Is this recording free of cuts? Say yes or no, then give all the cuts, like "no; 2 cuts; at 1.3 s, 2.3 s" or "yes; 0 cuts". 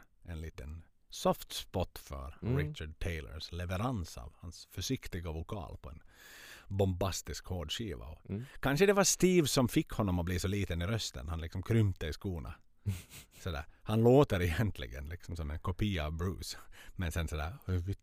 yes; 0 cuts